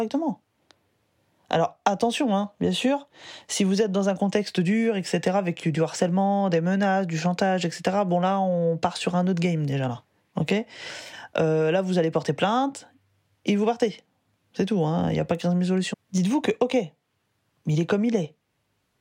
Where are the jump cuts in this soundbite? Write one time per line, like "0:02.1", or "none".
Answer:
0:15.9